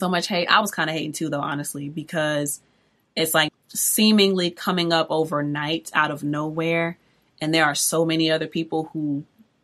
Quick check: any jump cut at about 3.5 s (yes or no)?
yes